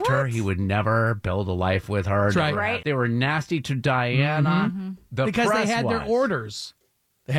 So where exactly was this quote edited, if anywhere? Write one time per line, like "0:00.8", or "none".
0:02.8